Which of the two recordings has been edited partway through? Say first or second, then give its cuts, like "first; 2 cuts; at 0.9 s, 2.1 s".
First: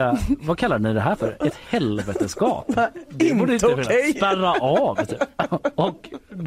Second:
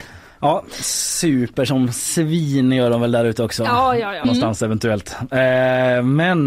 second; 1 cut; at 4.2 s